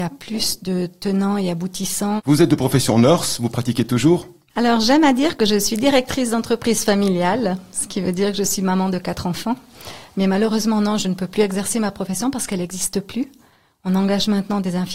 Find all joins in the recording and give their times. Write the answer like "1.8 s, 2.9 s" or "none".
2.2 s